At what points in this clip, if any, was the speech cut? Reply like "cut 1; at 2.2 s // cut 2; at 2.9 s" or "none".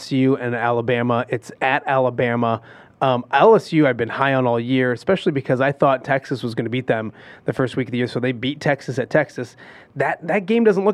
none